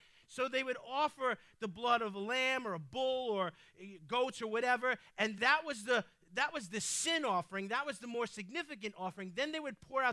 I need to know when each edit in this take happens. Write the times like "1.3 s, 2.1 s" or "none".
5.4 s